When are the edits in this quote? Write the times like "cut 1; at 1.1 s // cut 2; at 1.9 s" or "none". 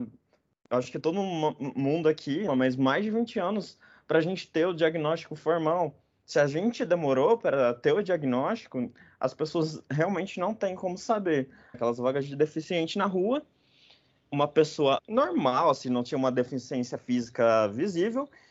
cut 1; at 2.5 s // cut 2; at 11.7 s // cut 3; at 15.8 s